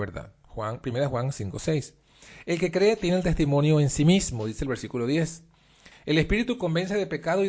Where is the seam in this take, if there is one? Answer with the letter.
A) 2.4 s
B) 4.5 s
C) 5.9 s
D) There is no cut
C